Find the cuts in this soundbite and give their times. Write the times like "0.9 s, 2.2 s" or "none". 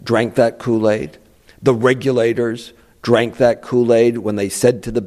none